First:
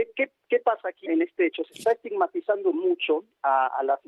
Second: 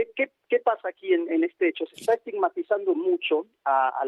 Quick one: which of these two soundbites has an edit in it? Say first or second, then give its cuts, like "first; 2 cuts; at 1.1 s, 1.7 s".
first; 1 cut; at 1.1 s